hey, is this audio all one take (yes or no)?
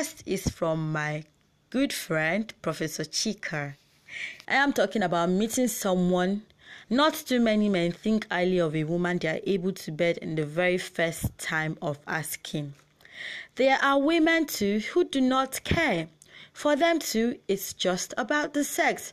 no